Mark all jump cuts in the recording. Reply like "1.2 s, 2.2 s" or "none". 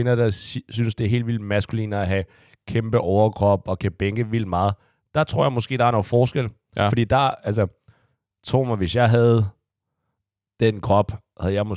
none